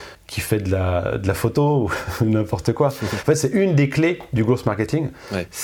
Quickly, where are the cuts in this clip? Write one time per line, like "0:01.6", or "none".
0:03.2